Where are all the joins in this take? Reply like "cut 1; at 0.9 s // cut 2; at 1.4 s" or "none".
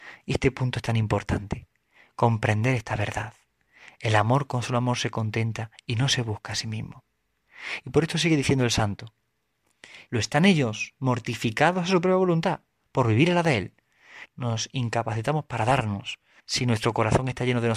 cut 1; at 10.1 s // cut 2; at 14.3 s // cut 3; at 16.4 s